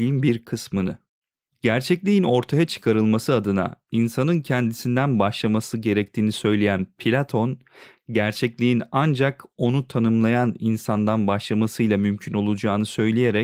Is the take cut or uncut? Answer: uncut